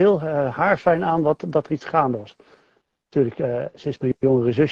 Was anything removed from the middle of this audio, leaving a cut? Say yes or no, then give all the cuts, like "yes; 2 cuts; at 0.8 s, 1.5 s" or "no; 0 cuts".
no; 0 cuts